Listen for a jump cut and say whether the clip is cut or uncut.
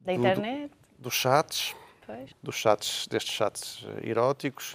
cut